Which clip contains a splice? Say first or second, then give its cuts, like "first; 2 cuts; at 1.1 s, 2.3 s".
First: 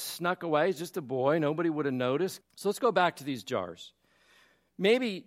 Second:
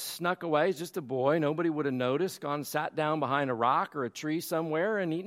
first; 1 cut; at 2.4 s